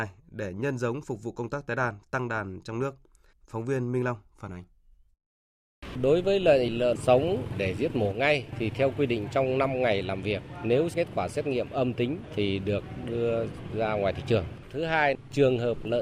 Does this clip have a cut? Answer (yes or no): yes